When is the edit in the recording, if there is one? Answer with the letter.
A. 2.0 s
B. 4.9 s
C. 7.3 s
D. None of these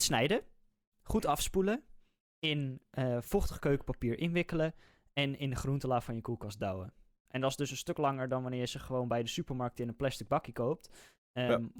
C